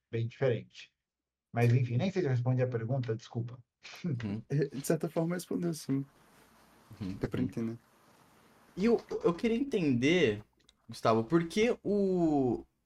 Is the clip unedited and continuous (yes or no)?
yes